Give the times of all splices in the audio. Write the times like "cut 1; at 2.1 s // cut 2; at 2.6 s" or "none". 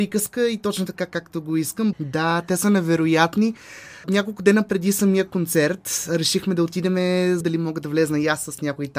cut 1; at 1.9 s // cut 2; at 7.4 s